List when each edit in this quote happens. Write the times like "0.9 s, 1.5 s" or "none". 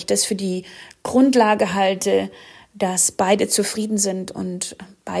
none